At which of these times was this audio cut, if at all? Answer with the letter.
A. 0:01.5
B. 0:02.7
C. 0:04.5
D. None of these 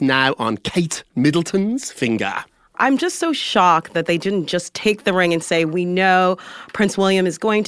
B